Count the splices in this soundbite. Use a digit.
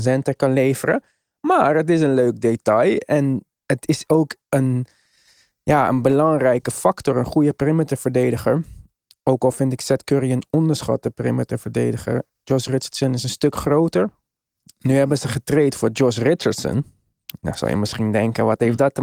1